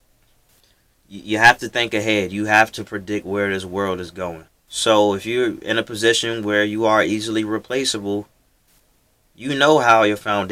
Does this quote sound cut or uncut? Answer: cut